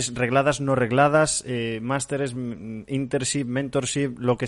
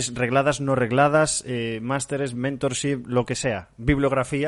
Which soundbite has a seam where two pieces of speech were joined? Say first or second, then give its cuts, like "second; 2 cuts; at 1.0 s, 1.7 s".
second; 1 cut; at 2.3 s